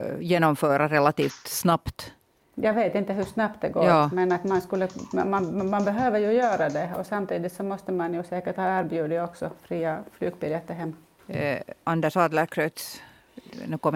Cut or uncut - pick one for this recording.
cut